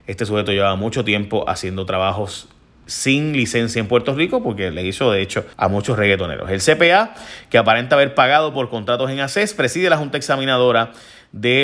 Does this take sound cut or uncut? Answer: cut